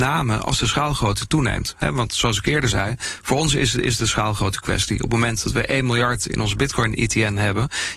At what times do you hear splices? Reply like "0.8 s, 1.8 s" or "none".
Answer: none